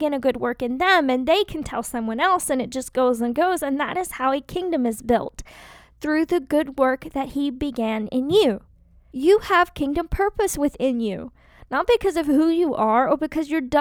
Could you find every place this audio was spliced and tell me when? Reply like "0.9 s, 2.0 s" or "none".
9.1 s